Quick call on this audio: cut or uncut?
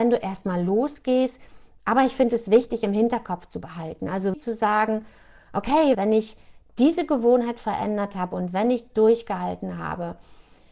cut